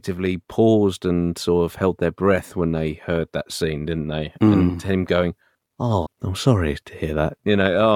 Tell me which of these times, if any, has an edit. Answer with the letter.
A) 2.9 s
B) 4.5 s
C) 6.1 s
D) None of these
C